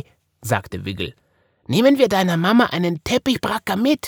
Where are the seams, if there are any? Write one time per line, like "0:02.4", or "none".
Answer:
none